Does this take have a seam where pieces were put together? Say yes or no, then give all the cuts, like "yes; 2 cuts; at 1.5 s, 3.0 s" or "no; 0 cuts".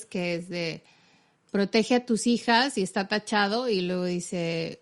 no; 0 cuts